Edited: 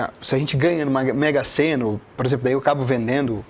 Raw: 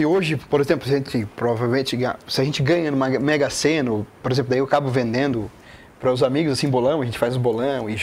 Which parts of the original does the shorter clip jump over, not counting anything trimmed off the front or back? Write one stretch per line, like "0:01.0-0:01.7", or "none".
none